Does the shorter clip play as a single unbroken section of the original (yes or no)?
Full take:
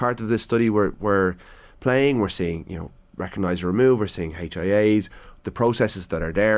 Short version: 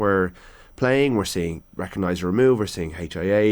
no